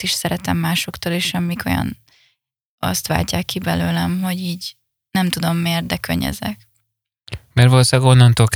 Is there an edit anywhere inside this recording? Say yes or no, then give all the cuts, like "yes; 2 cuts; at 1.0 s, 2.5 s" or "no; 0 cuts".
no; 0 cuts